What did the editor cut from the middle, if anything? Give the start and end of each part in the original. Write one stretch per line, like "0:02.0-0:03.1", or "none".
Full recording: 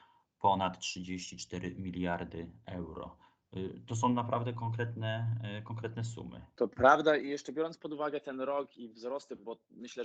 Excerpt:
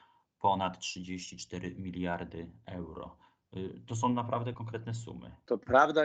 0:04.5-0:05.6